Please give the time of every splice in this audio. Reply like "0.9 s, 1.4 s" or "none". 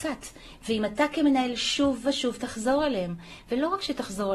none